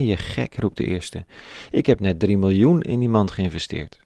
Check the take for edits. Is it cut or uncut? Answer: uncut